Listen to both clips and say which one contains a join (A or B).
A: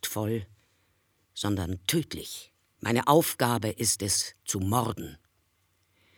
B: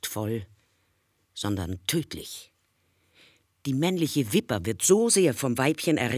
A